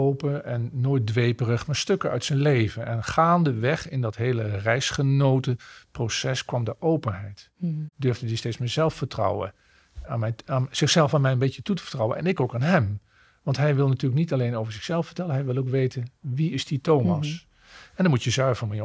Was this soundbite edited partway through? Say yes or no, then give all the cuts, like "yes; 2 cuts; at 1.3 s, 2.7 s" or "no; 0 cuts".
yes; 1 cut; at 10.0 s